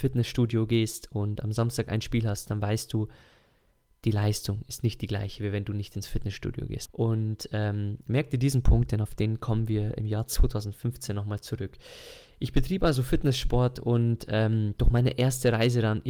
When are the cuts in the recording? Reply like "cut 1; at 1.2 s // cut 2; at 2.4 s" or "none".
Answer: cut 1; at 6.9 s